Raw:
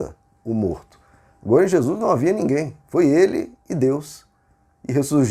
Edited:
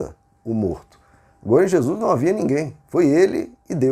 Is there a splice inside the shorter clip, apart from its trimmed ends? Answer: no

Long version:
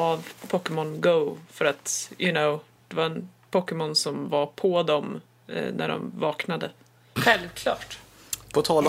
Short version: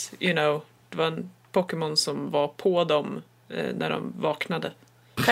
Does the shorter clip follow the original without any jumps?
yes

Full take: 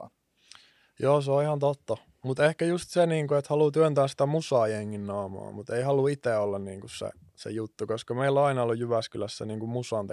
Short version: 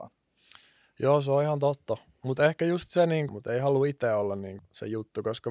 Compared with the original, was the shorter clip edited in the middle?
yes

